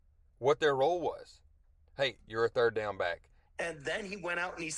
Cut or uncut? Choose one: cut